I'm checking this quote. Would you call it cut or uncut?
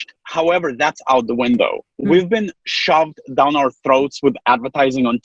uncut